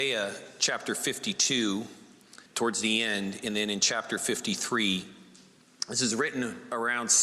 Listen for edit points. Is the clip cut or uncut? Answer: cut